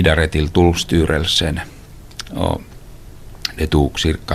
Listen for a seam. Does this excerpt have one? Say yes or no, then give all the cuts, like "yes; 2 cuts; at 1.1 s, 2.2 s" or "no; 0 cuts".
no; 0 cuts